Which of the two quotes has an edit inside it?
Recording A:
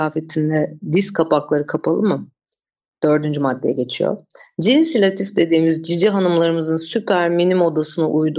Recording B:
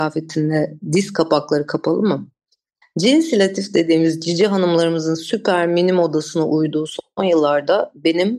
B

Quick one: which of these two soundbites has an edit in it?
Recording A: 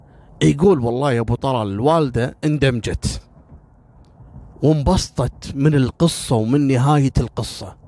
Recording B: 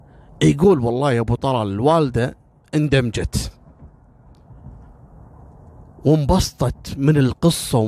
A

